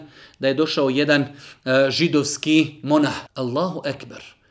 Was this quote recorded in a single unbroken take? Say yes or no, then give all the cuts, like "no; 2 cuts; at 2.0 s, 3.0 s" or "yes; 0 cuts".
no; 1 cut; at 3.3 s